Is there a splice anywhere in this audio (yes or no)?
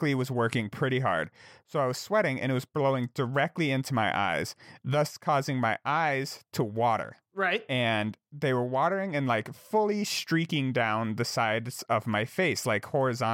no